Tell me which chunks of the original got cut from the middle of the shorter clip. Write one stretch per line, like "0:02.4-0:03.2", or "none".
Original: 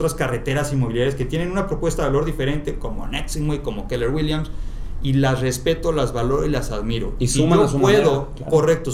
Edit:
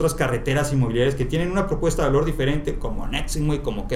none

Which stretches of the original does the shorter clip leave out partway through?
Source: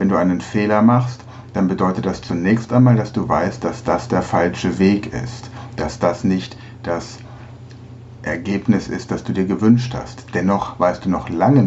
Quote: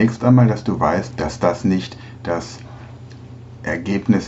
0:03.6-0:05.7

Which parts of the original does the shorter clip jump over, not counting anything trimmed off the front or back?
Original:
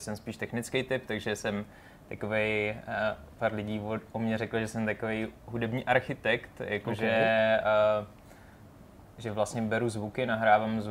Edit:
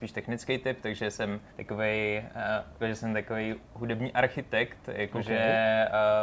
0:01.7-0:02.0
0:03.3-0:04.5

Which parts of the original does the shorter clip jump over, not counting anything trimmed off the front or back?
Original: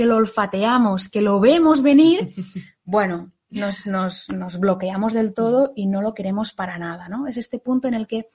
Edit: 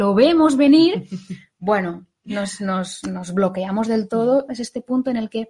0:05.7-0:07.3

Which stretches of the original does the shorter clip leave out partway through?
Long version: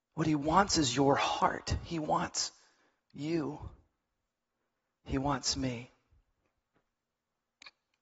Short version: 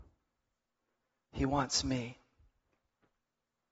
none

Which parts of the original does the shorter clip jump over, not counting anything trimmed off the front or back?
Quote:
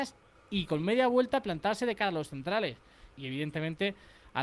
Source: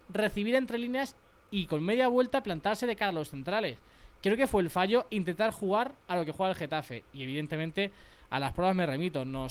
0:04.1-0:07.1

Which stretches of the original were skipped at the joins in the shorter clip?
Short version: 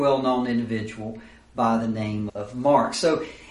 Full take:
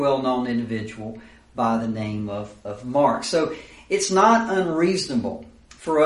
0:02.3-0:02.6

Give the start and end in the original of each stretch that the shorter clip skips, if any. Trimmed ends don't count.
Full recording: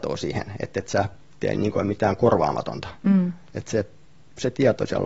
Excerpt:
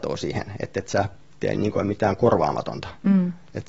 none

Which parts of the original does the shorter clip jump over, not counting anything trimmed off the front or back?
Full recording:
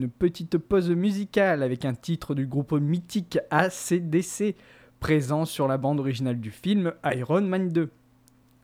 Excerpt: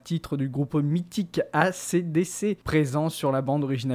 0:04.6-0:05.0

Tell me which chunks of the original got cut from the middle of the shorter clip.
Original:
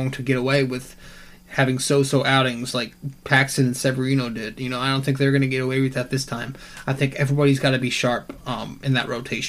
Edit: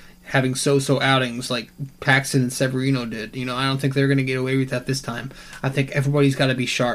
none

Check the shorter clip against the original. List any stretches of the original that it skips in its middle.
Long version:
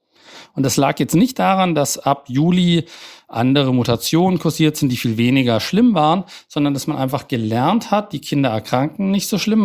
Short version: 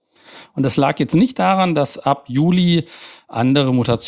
none

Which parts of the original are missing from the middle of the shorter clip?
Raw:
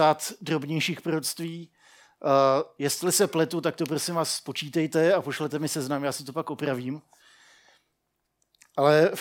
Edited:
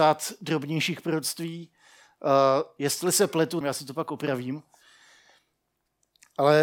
0:03.6-0:06.0

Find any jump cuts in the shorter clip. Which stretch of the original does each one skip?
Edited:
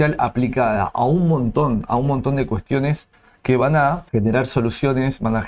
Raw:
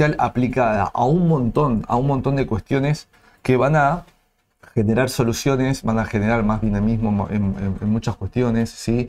0:04.1-0:04.7

